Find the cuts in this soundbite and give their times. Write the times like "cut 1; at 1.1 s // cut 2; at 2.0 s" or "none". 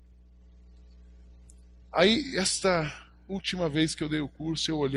none